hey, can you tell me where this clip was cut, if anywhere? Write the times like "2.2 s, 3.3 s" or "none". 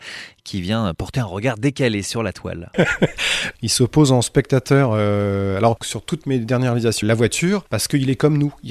2.7 s, 7.0 s